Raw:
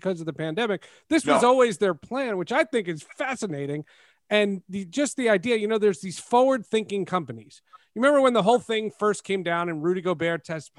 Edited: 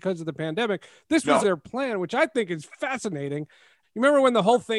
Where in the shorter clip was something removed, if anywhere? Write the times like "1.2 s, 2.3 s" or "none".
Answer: 1.4 s, 3.8 s